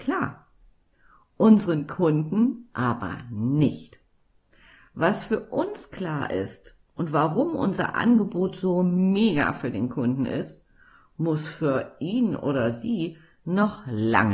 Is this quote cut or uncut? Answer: uncut